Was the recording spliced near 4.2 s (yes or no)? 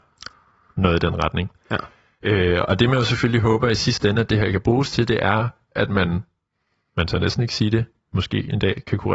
no